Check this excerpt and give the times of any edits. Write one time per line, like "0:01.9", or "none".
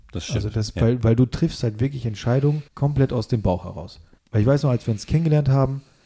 0:02.7
0:04.2